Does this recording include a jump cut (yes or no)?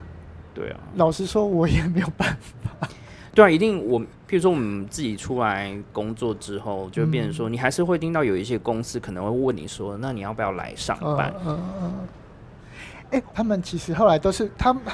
yes